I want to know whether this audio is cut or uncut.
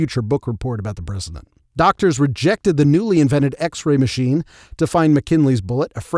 cut